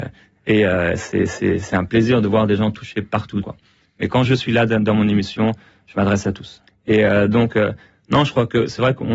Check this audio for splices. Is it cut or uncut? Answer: cut